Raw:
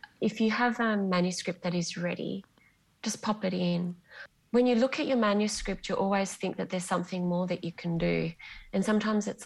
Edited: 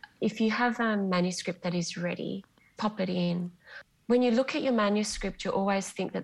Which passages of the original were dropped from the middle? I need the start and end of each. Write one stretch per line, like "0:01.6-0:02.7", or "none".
0:02.8-0:03.2

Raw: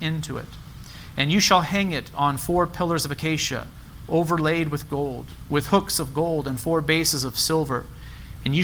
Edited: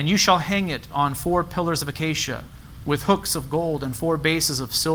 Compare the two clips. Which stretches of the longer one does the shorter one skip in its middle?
0:04.1-0:05.5

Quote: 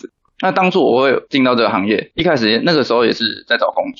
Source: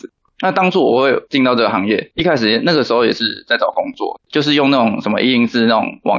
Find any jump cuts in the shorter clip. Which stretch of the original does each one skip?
none

